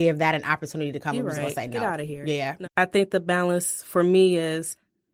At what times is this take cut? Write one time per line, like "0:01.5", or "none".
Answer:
0:02.6